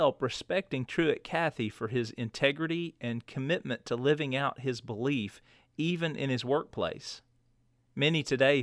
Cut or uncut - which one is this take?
uncut